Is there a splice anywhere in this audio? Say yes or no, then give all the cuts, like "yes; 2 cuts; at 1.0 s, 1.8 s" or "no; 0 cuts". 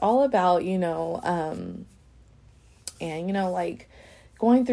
yes; 1 cut; at 2.9 s